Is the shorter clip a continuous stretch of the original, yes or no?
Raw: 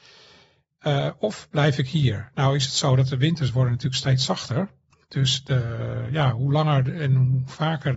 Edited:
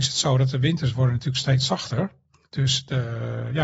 yes